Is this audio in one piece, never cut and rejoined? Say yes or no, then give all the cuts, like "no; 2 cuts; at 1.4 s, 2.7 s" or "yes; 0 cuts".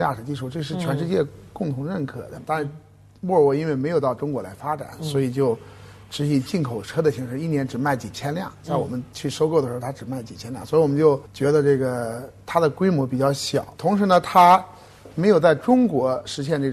no; 1 cut; at 2.3 s